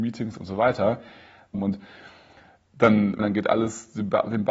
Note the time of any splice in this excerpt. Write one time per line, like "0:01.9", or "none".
0:01.5
0:03.2